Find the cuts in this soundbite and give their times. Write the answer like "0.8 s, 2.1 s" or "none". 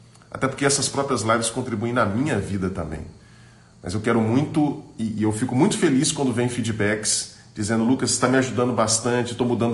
none